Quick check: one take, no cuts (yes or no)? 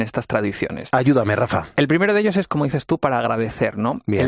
yes